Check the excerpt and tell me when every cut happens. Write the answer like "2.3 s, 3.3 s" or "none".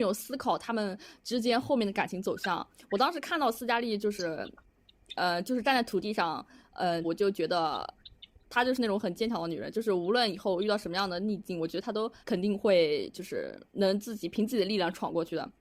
7.0 s, 12.2 s, 13.7 s